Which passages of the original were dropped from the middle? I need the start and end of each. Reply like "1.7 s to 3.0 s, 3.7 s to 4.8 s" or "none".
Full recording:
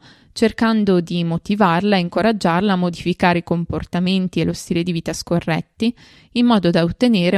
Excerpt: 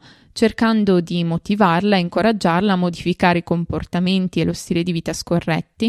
none

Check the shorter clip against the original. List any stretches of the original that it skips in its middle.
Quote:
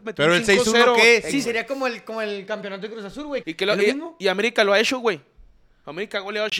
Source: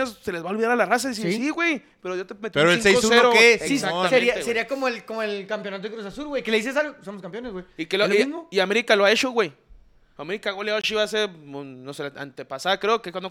3.8 s to 4.4 s, 6.4 s to 7.7 s

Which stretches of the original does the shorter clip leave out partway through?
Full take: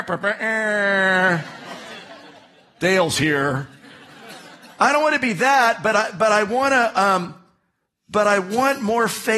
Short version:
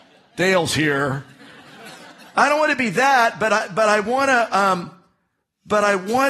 none

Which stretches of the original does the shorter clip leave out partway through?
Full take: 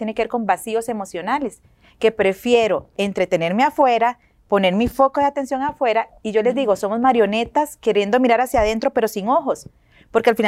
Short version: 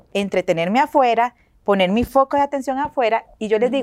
none

